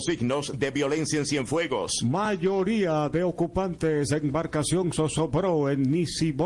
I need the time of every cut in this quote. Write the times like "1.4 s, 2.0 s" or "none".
none